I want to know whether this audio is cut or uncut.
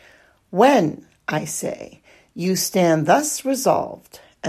uncut